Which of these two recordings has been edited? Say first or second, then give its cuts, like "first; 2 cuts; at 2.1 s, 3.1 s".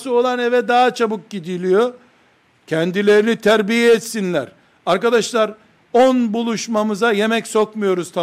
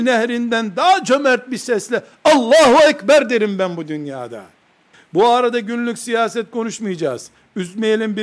second; 1 cut; at 4.9 s